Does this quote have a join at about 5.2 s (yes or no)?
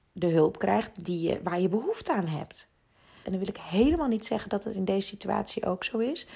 no